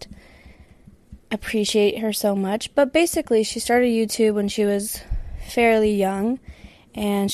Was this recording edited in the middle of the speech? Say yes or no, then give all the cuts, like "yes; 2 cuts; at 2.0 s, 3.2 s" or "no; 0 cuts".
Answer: no; 0 cuts